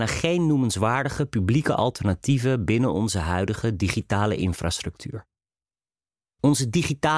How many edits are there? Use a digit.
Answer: 1